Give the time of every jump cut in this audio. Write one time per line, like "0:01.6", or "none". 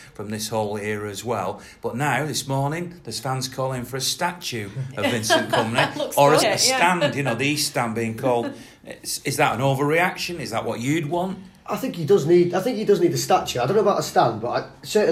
0:06.4